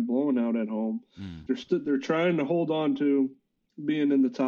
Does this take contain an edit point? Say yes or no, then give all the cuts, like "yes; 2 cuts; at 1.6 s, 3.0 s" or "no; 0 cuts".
yes; 1 cut; at 1.5 s